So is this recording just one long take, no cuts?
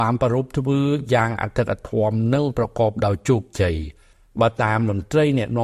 yes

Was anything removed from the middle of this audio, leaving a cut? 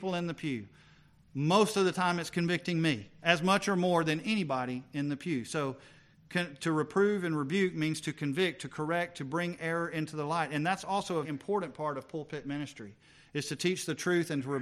yes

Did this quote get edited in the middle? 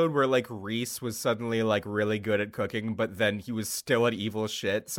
no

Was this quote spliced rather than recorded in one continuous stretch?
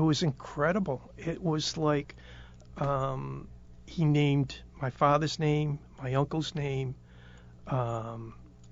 no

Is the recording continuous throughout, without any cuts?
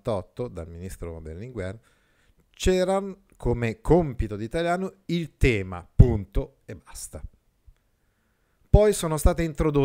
yes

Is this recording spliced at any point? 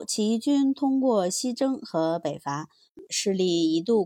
yes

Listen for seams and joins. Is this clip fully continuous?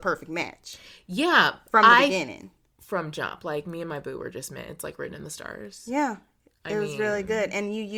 yes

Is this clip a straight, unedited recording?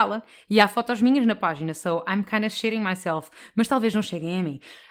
yes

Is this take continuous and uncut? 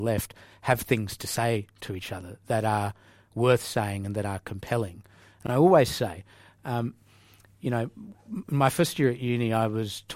yes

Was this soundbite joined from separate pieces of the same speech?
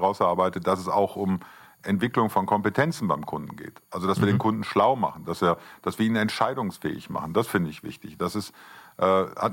no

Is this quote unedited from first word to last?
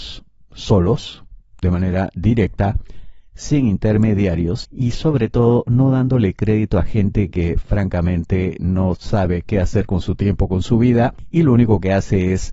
yes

